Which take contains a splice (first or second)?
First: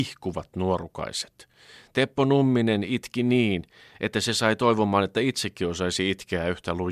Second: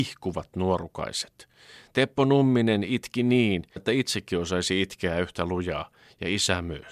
second